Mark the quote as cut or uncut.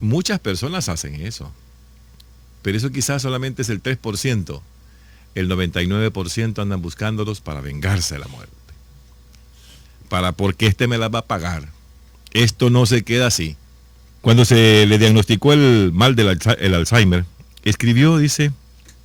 cut